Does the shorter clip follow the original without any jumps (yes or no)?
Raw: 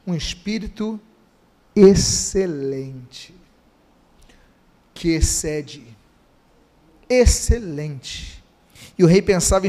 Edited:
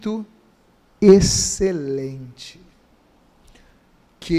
yes